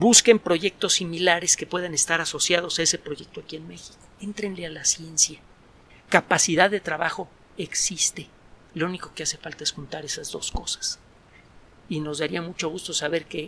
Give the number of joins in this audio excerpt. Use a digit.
1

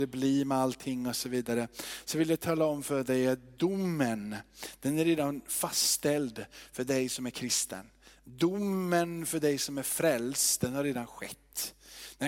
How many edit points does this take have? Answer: 0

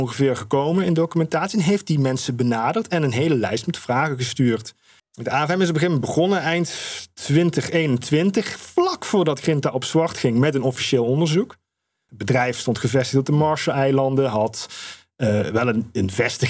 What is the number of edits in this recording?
2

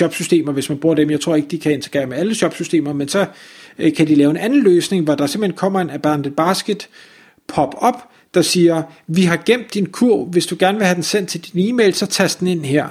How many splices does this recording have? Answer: 0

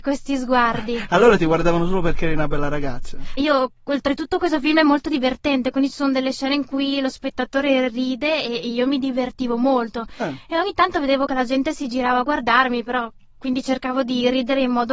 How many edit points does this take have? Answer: 1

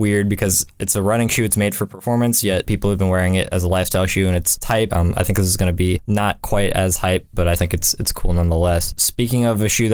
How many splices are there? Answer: 2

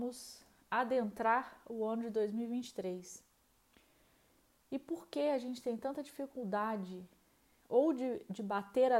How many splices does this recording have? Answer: 0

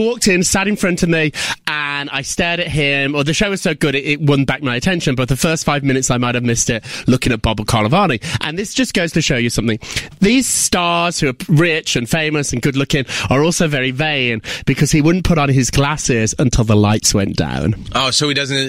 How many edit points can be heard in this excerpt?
0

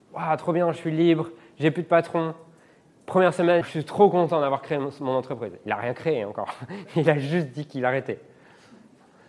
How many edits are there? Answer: 1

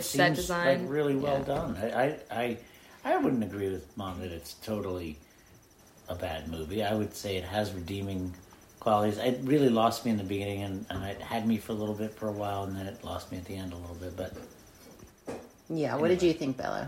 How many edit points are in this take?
0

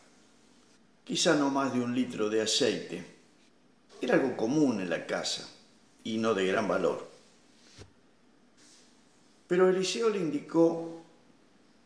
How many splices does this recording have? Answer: 1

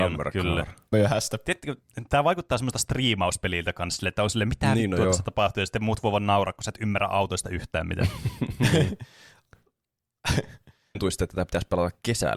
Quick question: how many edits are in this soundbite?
2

